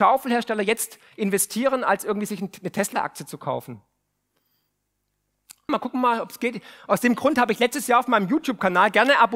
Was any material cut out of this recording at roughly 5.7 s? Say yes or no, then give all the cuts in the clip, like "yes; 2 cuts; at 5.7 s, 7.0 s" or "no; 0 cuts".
yes; 1 cut; at 5.7 s